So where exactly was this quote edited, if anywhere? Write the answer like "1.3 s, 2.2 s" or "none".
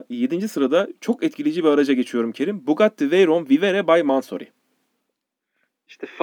none

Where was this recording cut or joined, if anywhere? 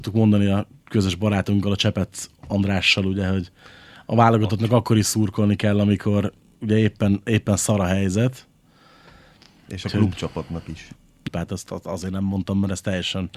11.3 s

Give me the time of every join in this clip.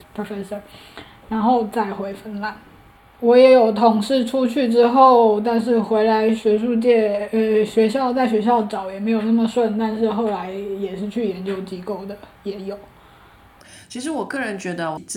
none

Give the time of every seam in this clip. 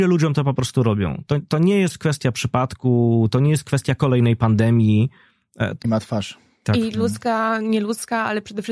5.8 s

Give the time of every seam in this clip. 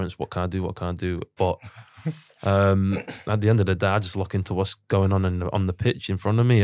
1.4 s

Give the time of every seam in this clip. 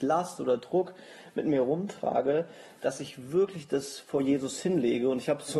none

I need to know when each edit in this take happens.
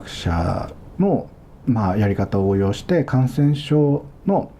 none

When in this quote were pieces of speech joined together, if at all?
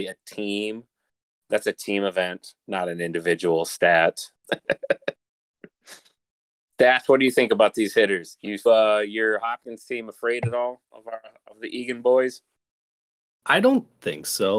4.4 s, 8.7 s

